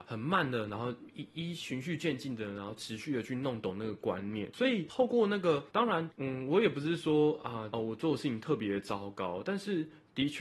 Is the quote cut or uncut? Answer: cut